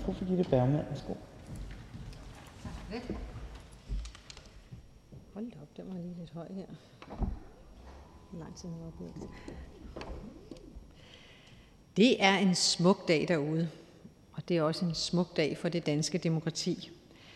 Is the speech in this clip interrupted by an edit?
no; 0 cuts

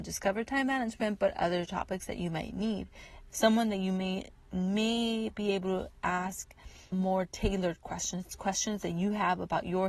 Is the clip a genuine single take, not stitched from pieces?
no; 2 cuts; at 3.3 s, 6.9 s

